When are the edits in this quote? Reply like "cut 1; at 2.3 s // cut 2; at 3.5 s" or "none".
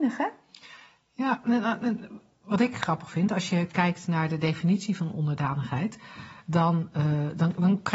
none